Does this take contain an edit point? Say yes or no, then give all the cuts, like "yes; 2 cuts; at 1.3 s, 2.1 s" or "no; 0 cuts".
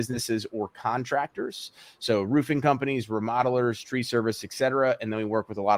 no; 0 cuts